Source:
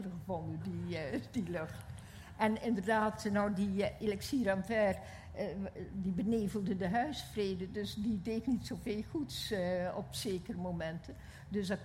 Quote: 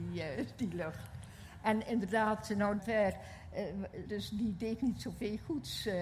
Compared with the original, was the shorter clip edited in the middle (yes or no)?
yes